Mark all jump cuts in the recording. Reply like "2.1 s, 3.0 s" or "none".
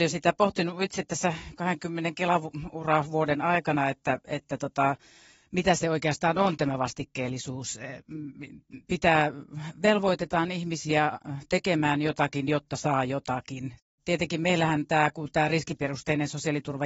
none